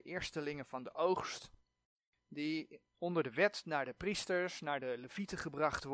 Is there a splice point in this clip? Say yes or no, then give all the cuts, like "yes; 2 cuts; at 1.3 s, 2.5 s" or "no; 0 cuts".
no; 0 cuts